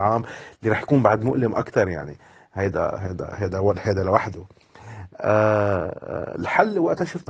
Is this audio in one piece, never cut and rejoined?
no; 1 cut; at 3.3 s

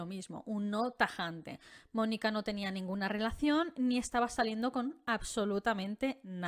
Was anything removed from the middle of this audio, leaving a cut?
no; 0 cuts

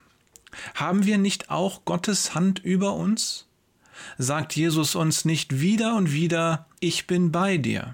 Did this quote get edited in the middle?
yes; 1 cut; at 6.8 s

